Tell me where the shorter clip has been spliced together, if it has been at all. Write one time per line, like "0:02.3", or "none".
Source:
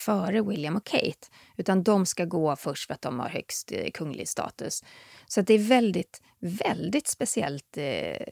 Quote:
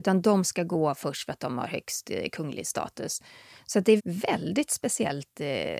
0:04.0